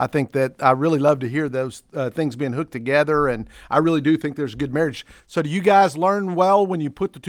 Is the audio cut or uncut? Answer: uncut